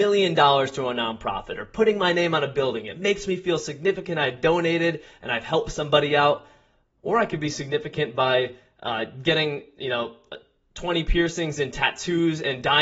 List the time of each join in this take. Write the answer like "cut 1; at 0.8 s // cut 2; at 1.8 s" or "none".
none